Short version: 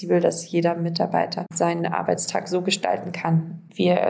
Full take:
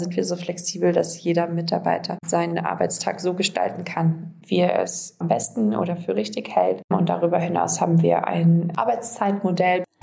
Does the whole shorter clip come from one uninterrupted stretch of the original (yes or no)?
yes